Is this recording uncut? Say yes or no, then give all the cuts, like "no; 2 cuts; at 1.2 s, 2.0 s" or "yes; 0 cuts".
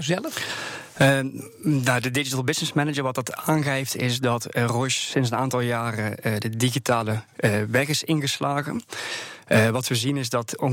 yes; 0 cuts